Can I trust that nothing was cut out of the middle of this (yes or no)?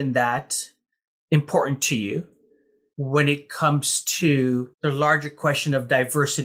no